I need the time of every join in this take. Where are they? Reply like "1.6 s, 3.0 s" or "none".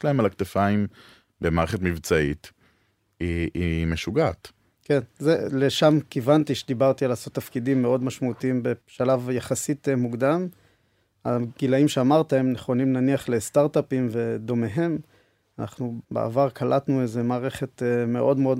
none